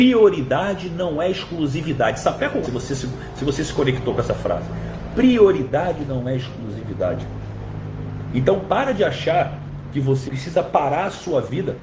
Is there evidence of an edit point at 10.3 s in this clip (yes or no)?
yes